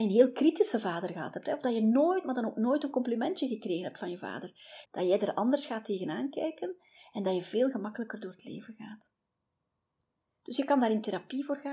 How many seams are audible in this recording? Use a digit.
1